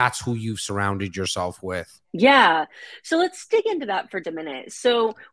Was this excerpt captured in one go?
no; 2 cuts; at 2.0 s, 4.2 s

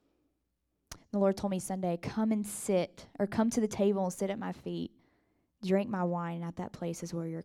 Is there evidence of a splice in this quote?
no; 0 cuts

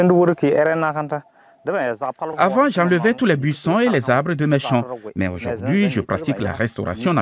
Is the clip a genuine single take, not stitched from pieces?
yes; 0 cuts

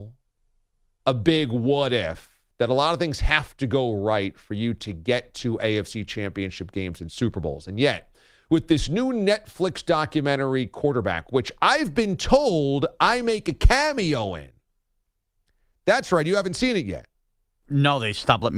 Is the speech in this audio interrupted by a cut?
no; 0 cuts

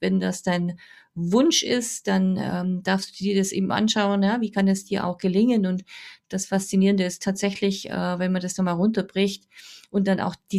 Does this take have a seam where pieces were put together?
no; 0 cuts

